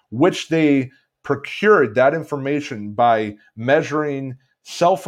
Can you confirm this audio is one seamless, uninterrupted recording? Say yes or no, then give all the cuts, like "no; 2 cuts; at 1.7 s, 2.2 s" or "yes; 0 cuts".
yes; 0 cuts